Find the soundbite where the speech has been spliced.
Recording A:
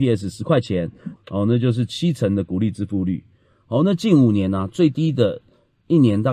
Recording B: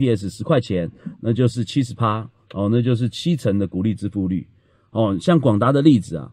A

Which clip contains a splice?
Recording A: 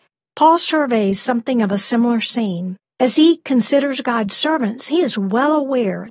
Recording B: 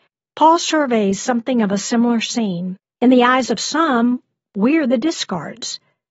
B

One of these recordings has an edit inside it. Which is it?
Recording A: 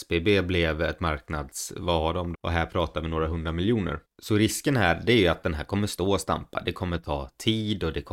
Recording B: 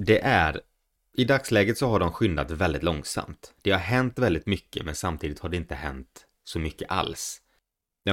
A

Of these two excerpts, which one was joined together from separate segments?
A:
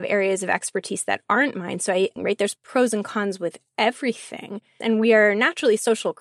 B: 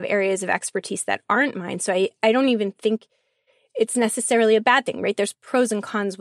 A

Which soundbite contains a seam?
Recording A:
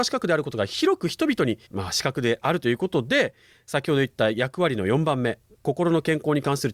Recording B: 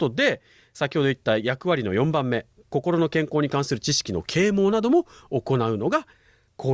A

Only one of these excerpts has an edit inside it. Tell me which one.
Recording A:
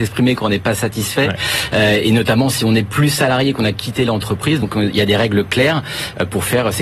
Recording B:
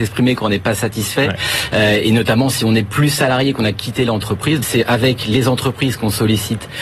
B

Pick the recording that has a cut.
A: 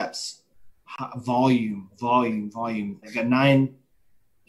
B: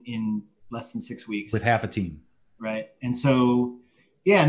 A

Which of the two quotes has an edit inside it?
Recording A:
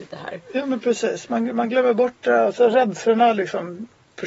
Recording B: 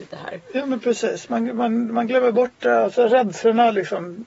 A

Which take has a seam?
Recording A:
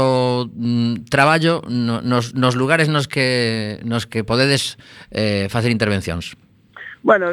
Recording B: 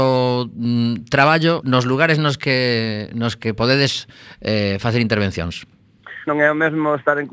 B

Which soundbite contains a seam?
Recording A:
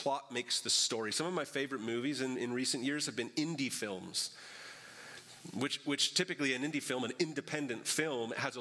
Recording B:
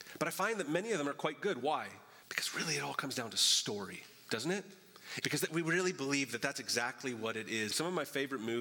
B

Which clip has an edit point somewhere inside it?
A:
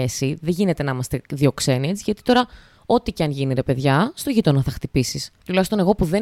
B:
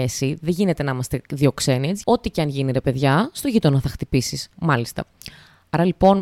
B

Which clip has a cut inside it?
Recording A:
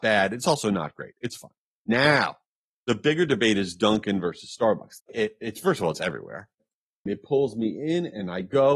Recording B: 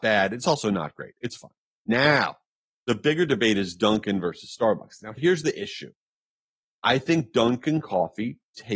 A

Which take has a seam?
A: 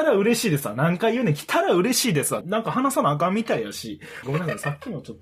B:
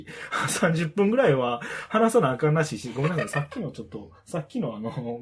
A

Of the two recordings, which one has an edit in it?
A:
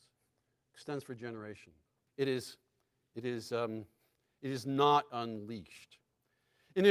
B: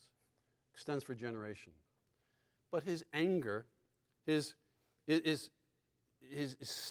A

